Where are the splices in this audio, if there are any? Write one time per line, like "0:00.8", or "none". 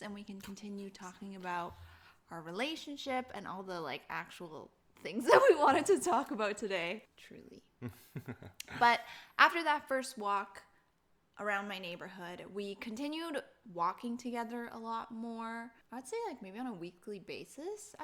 0:07.1
0:15.8